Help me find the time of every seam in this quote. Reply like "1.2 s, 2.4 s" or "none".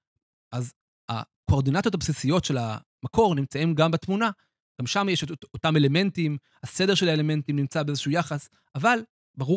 none

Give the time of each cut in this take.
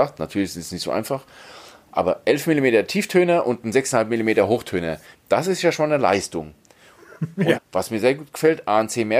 5.1 s, 7.5 s

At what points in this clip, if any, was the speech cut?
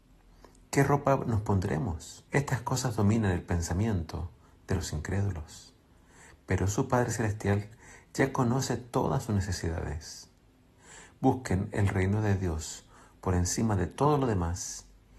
2.3 s

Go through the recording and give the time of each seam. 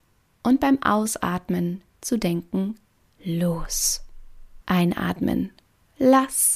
4.6 s

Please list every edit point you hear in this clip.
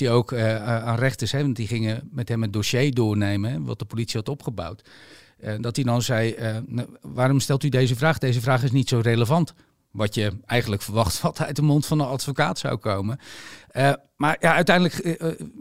none

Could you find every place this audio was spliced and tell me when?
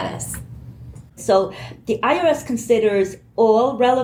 1.2 s

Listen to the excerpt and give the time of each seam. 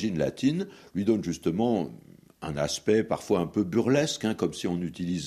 none

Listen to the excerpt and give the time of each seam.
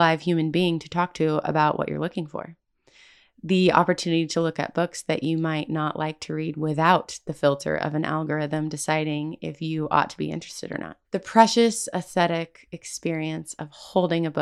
11.0 s

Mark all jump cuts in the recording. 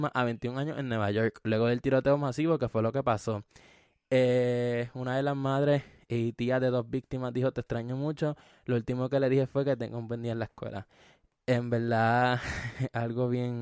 none

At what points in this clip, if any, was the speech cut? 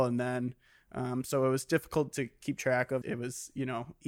3.0 s

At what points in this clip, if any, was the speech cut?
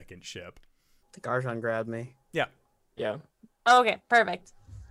1.0 s

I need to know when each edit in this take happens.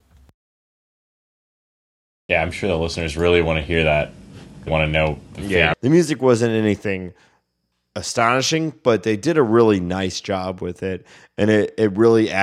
4.7 s, 5.7 s

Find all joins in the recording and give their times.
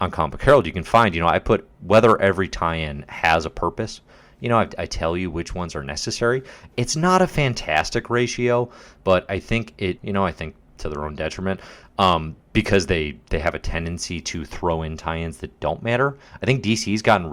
10.0 s

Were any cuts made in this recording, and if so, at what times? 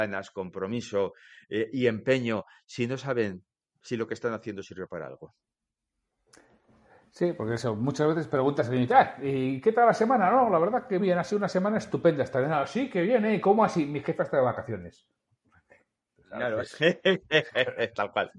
11.0 s

